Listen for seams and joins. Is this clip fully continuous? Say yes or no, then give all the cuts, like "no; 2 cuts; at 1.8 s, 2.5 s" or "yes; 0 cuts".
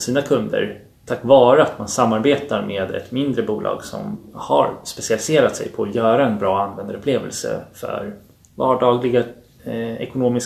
yes; 0 cuts